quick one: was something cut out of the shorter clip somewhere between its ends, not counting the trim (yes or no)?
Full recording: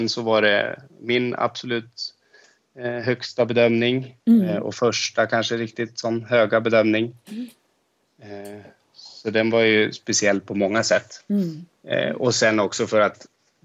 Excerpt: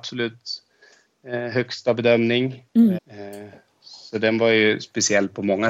yes